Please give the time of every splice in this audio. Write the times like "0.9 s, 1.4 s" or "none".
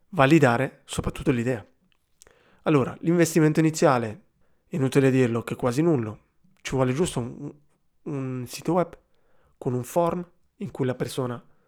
none